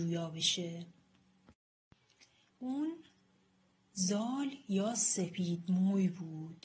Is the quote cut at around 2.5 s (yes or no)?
yes